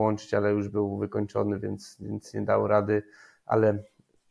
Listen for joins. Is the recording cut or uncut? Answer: uncut